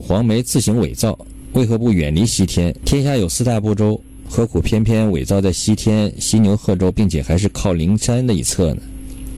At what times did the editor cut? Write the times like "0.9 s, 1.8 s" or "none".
2.8 s